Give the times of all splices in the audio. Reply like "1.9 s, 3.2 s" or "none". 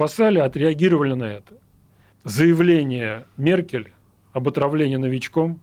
2.1 s

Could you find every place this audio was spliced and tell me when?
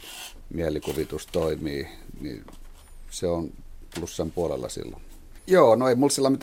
2.2 s, 5.4 s

